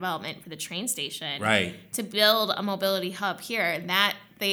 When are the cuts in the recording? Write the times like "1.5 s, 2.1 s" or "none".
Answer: none